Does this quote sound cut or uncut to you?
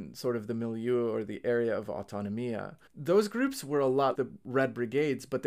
cut